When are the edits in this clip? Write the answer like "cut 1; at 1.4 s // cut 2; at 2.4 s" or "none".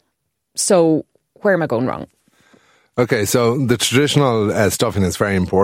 none